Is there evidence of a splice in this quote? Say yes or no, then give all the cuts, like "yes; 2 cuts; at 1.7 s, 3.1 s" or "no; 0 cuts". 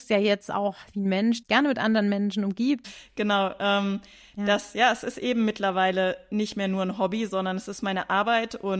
yes; 2 cuts; at 1.4 s, 2.8 s